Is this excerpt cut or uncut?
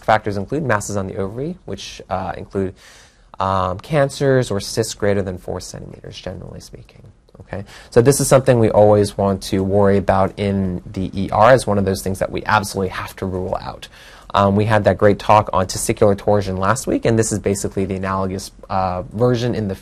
uncut